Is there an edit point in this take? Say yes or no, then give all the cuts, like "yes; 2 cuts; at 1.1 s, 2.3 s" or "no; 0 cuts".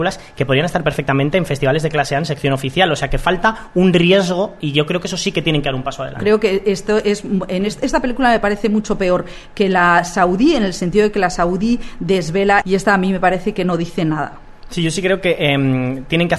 yes; 2 cuts; at 6.2 s, 12.6 s